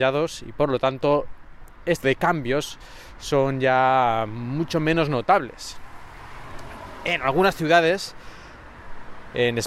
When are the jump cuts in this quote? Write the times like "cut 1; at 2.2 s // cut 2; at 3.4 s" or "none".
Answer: cut 1; at 2.0 s